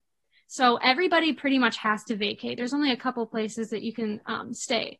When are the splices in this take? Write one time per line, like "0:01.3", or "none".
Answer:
none